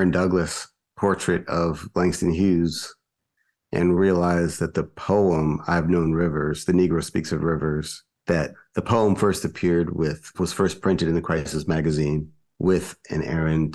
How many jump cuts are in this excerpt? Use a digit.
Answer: 0